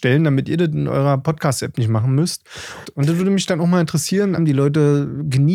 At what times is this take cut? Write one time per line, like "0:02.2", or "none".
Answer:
0:02.8
0:04.4